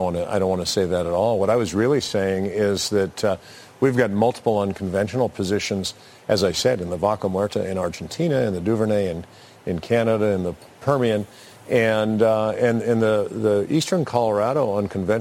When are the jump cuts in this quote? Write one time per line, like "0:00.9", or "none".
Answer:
none